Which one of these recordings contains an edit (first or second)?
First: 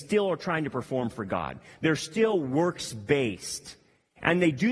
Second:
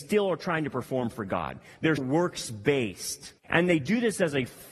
second